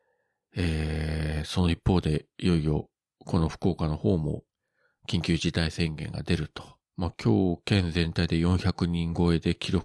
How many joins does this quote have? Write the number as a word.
one